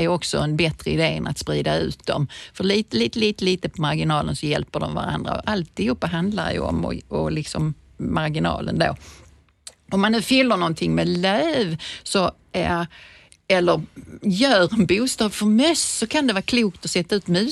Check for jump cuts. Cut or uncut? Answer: uncut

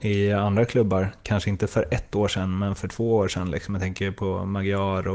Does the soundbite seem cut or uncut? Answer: uncut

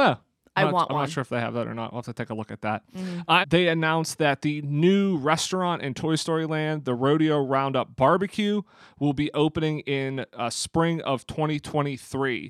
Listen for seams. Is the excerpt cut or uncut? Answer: cut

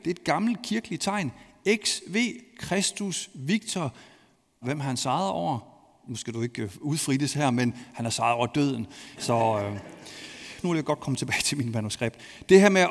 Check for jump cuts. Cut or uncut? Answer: cut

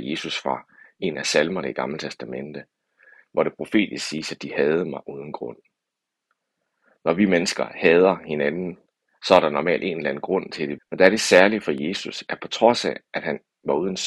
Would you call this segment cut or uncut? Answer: cut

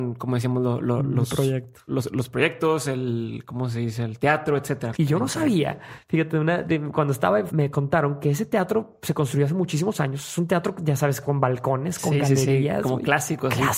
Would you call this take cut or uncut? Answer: cut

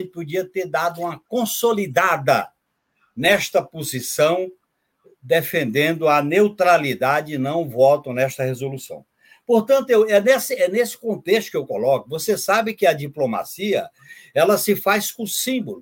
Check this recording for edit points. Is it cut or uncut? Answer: uncut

